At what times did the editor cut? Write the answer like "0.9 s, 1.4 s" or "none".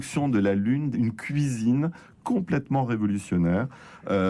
0.9 s